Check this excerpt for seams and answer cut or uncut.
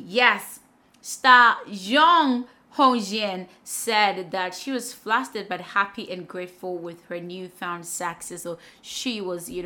uncut